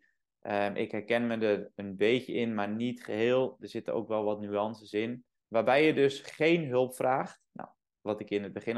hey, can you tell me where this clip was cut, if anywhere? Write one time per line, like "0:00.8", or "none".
0:05.4